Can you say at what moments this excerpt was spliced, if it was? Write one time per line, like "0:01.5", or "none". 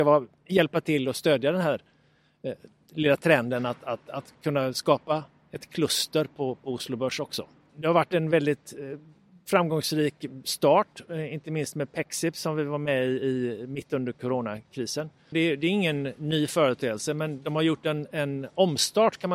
0:07.7
0:15.3